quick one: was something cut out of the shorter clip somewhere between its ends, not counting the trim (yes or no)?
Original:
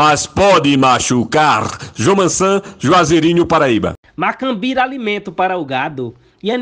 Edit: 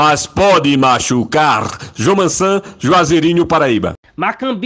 no